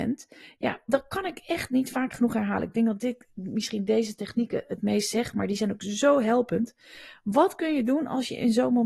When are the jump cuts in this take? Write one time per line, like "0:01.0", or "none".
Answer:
none